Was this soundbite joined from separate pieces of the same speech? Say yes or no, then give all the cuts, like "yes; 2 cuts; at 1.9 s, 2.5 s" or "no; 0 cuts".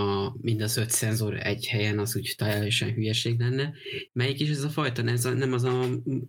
yes; 1 cut; at 4.1 s